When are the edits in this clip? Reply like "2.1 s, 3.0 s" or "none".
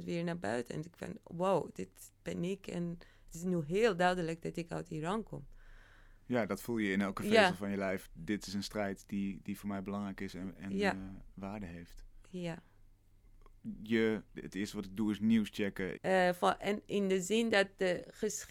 14.3 s, 15.9 s